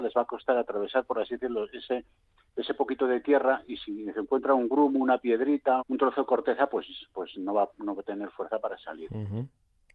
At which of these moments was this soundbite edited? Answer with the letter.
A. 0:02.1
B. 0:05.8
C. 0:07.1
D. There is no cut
B